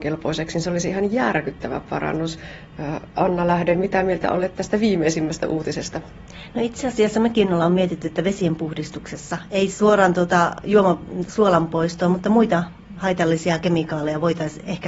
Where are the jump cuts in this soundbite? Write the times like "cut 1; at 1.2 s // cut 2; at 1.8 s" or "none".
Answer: cut 1; at 11.3 s